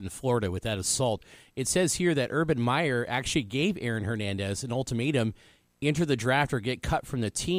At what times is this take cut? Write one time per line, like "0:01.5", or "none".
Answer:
none